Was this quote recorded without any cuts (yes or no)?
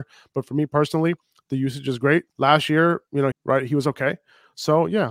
no